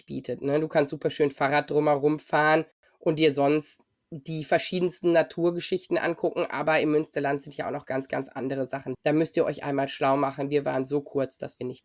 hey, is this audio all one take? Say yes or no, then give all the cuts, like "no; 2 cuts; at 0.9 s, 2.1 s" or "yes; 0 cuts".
no; 1 cut; at 8.9 s